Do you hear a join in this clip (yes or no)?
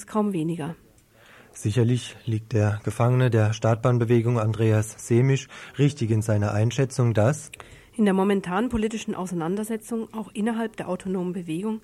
no